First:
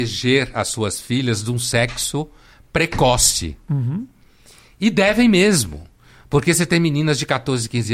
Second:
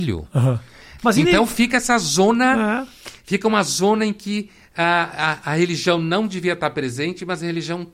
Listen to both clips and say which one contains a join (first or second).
second